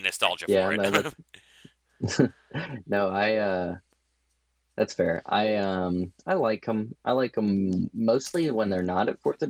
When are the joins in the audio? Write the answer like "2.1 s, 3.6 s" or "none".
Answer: none